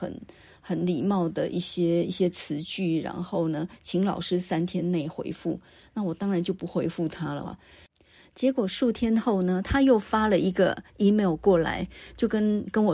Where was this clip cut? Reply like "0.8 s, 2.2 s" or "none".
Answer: 7.4 s

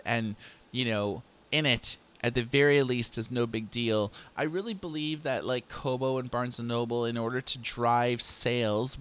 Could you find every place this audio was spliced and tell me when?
none

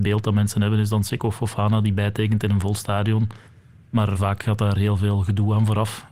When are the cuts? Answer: 4.1 s

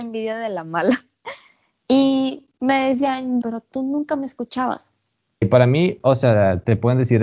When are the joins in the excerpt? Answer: 1.7 s, 3.4 s, 5.4 s

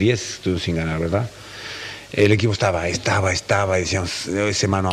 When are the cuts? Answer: none

